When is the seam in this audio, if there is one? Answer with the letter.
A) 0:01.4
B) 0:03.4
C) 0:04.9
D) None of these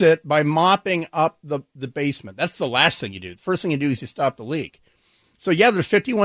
D